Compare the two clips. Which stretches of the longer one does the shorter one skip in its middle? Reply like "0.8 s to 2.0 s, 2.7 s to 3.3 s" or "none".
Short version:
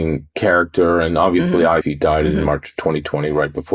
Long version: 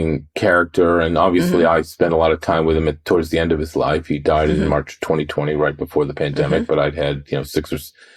1.8 s to 4.0 s